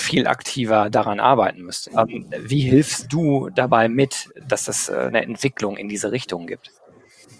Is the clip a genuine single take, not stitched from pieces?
no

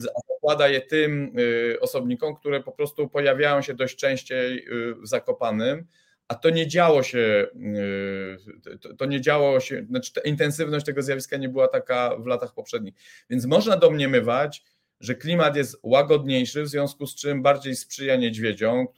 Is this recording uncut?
yes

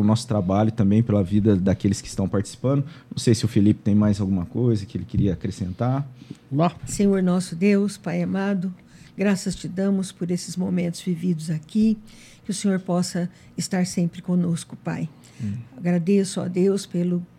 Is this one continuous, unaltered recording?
no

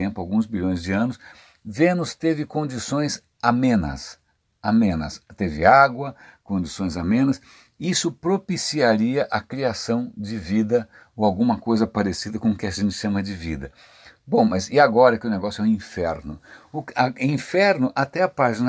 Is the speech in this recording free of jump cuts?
yes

